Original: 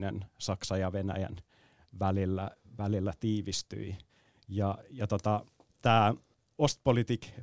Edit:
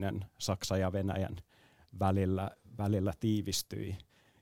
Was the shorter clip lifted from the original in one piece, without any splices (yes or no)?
yes